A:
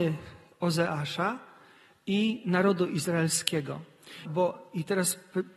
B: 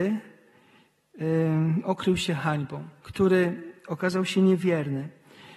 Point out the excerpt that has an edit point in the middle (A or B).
A